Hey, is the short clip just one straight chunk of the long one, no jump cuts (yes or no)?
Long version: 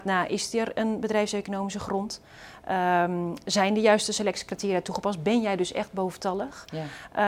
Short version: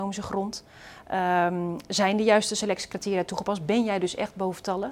yes